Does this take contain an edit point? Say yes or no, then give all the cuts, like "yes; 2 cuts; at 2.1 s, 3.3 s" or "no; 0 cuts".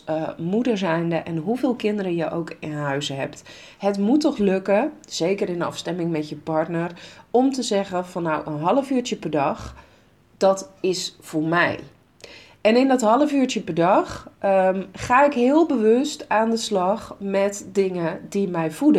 no; 0 cuts